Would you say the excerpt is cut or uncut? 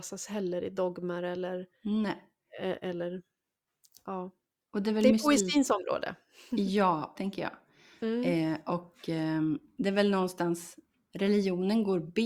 cut